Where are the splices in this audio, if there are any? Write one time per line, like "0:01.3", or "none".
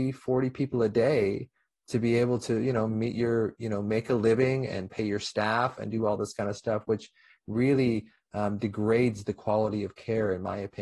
none